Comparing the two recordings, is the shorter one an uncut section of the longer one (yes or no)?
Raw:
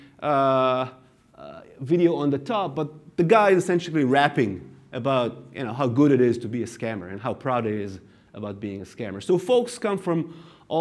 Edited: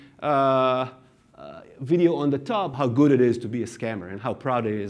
no